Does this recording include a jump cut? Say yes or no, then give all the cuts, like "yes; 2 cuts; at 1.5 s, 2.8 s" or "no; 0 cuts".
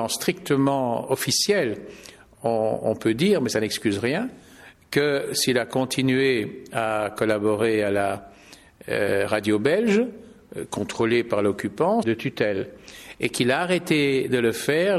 yes; 1 cut; at 12.0 s